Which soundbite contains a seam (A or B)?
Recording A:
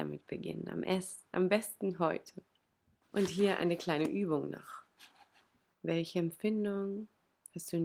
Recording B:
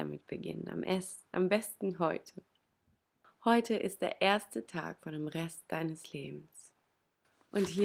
A